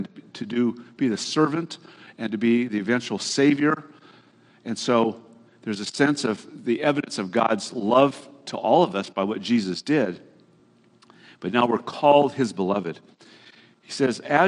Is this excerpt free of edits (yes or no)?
yes